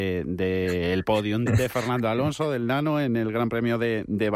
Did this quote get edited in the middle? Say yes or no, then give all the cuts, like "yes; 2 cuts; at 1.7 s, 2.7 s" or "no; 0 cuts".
yes; 1 cut; at 1.5 s